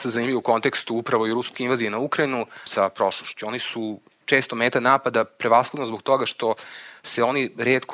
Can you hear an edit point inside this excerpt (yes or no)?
yes